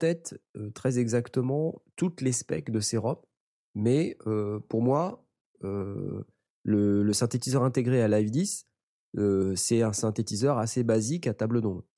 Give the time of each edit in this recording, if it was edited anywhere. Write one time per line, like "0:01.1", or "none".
none